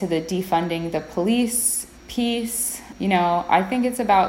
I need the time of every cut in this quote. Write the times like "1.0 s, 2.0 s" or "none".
2.0 s